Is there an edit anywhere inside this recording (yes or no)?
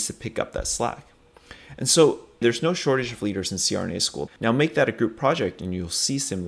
yes